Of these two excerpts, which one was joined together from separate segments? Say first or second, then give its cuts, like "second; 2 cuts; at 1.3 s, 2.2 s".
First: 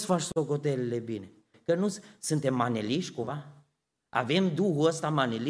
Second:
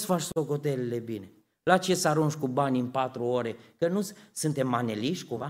first; 1 cut; at 1.5 s